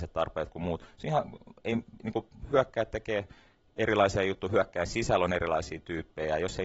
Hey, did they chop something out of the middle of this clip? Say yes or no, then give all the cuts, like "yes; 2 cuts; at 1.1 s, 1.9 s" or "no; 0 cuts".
no; 0 cuts